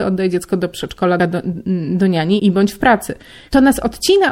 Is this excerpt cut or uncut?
cut